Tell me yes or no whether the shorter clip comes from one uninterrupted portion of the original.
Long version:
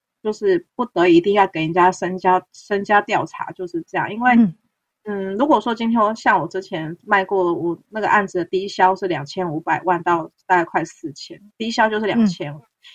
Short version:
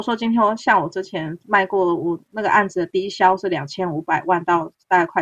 yes